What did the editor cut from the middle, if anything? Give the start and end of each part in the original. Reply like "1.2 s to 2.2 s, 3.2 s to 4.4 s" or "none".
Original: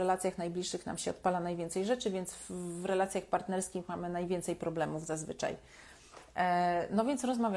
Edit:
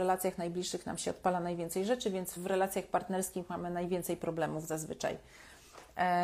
2.4 s to 2.7 s

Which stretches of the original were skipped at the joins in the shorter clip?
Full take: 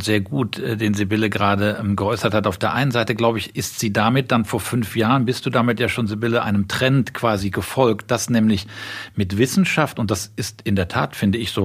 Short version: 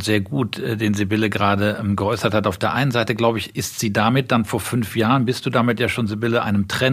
none

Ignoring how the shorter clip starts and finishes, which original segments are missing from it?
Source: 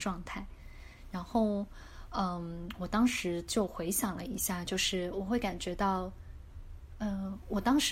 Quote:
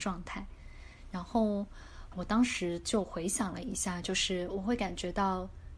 2.1 s to 2.8 s

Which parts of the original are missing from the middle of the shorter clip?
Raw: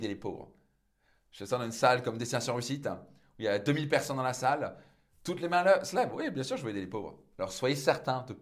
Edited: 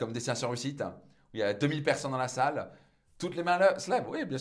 none

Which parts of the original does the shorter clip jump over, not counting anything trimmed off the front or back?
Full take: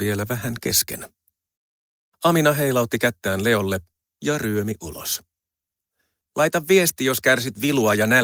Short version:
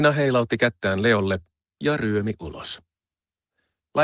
none

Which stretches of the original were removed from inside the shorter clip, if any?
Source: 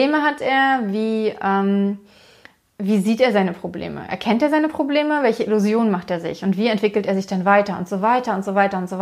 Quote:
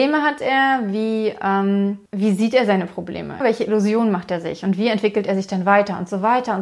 2.1 s to 2.7 s, 4.1 s to 5.2 s

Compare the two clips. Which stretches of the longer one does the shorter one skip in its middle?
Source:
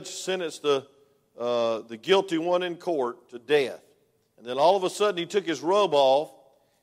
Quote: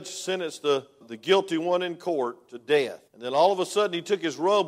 1.0 s to 1.8 s, 3.9 s to 4.3 s

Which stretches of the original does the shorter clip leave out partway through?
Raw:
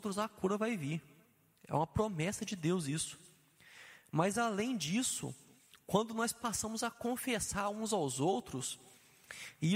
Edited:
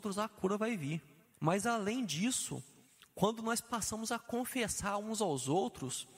1.3 s to 4.0 s

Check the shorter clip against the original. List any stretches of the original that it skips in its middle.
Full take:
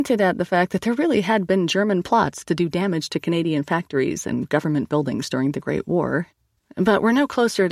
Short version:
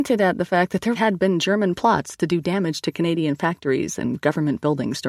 0.9 s to 1.2 s

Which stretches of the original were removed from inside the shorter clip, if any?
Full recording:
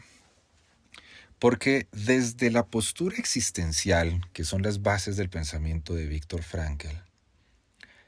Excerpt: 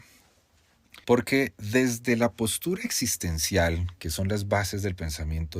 1.0 s to 1.4 s

